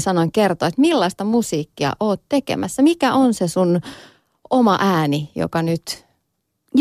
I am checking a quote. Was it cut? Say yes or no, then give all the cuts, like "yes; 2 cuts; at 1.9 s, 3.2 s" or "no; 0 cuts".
no; 0 cuts